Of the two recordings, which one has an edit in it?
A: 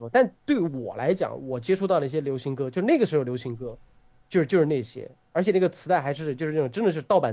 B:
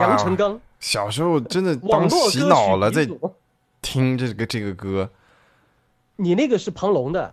B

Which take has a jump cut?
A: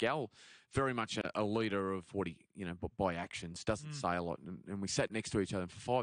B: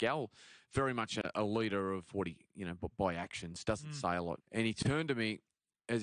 B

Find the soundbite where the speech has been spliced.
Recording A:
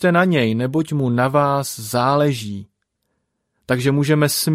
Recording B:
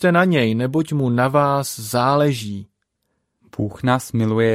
B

